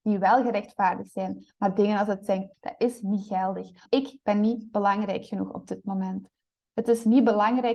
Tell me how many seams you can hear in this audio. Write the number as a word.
two